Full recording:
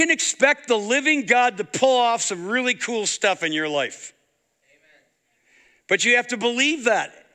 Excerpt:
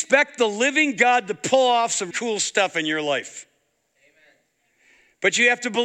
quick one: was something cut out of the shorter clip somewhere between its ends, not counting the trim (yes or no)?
yes